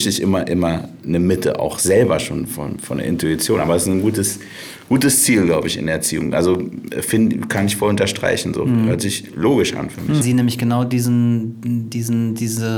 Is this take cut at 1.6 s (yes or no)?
no